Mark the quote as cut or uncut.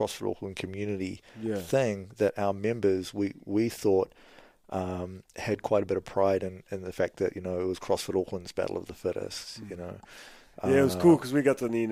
uncut